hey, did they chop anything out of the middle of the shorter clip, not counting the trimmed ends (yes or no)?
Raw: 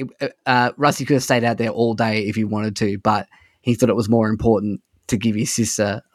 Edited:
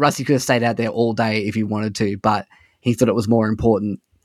no